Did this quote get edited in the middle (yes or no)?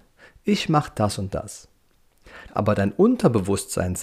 yes